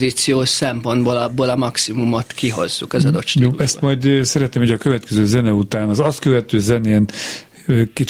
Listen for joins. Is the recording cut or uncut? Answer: uncut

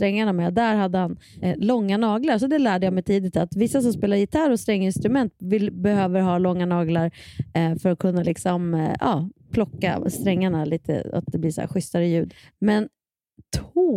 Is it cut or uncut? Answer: uncut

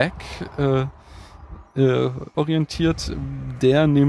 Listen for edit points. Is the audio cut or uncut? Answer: cut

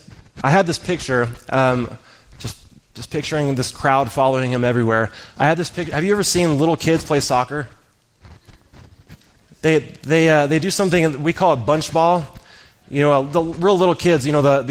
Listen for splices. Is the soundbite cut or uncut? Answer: uncut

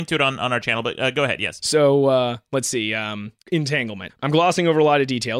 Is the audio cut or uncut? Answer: cut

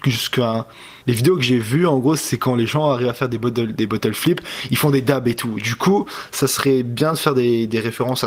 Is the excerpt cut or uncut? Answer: cut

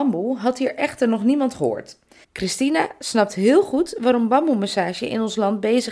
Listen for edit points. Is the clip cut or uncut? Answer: cut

